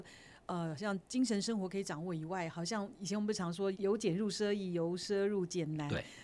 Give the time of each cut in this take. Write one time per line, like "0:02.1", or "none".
0:03.7